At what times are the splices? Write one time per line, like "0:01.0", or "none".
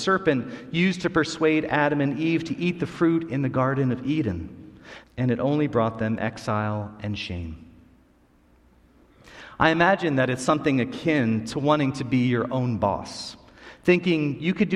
0:05.0